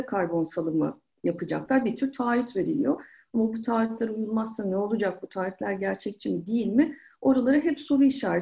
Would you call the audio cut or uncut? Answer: uncut